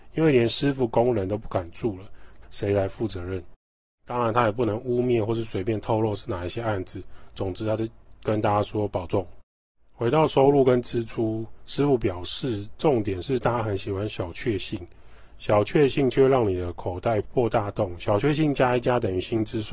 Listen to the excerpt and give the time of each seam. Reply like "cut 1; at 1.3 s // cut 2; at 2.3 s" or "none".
cut 1; at 2.4 s